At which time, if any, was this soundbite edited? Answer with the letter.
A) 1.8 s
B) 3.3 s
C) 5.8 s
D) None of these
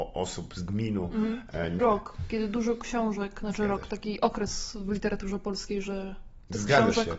A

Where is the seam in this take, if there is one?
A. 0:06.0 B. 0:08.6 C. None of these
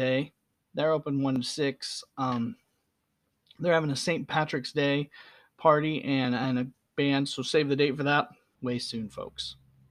B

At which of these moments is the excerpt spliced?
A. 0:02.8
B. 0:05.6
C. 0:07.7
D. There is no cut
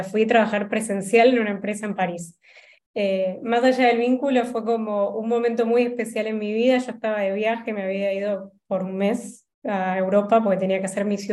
A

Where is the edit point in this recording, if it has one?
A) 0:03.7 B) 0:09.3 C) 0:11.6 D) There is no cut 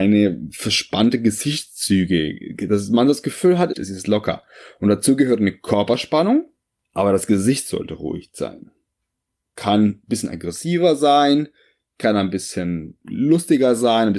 A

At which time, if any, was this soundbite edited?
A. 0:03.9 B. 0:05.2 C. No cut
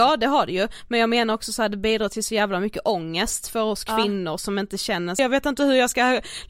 B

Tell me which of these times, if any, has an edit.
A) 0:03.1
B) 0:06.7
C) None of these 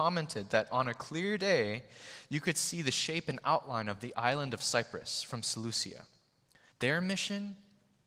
B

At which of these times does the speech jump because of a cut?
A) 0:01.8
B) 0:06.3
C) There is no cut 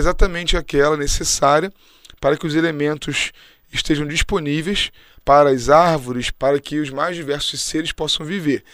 B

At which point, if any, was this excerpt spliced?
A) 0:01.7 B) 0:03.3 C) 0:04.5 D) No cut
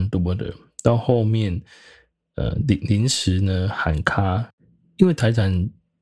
D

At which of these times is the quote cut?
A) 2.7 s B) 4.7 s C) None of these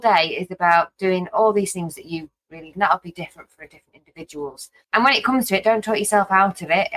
A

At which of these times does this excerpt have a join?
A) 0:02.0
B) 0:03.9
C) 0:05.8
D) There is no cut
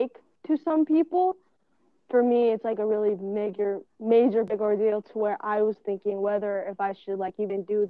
A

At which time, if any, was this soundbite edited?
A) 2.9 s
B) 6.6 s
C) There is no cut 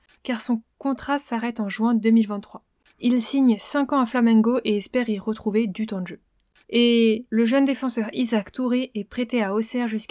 A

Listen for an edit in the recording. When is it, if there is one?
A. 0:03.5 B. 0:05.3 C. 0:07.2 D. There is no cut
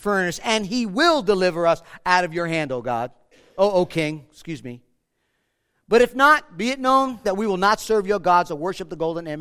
C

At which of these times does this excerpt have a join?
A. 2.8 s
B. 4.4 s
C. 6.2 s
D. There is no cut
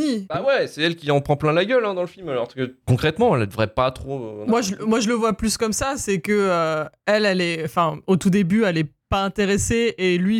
A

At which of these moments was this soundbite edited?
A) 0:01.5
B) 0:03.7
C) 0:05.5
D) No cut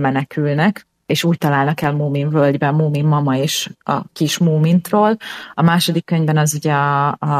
D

